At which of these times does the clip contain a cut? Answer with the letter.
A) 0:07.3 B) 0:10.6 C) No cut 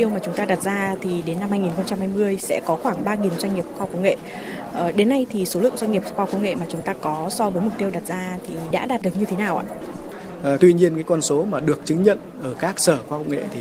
B